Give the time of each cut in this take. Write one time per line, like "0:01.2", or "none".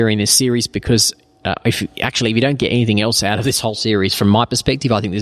none